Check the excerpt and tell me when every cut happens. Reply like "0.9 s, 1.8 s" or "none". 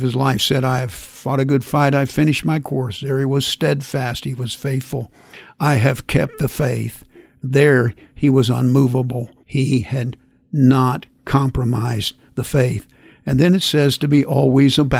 9.4 s